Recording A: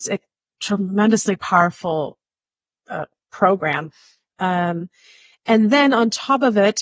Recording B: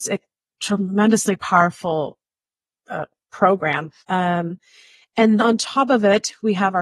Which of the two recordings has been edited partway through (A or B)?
B